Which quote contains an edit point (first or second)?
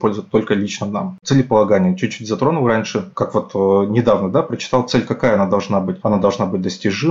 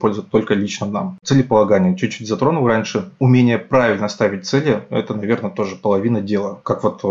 first